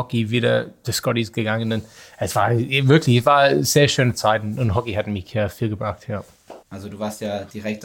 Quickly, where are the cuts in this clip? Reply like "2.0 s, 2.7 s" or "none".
6.6 s